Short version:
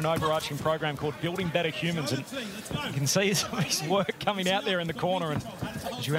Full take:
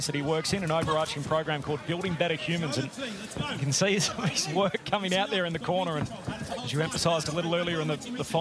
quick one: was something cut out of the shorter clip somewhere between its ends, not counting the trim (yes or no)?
no